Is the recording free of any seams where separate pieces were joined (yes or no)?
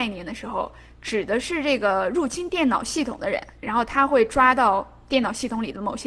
yes